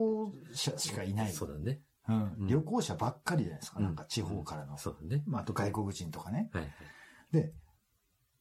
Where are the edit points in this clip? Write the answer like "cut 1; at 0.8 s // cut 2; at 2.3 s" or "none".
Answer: none